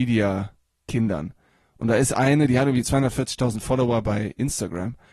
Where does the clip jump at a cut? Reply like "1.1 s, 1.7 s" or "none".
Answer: none